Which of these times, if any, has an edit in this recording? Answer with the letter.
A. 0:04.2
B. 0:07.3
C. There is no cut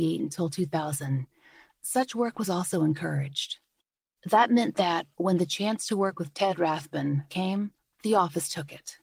B